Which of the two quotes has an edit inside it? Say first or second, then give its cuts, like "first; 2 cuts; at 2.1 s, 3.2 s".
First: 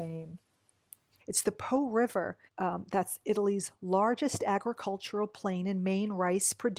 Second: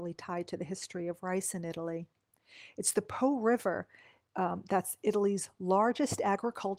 first; 2 cuts; at 1.2 s, 2.5 s